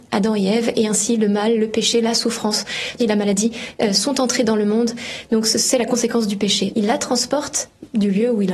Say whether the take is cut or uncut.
cut